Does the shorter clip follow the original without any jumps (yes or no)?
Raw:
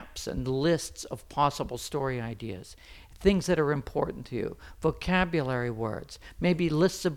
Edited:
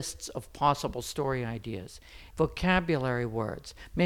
no